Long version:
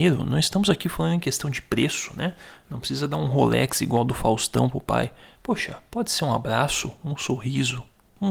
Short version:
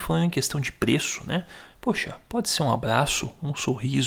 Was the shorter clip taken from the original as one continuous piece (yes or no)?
no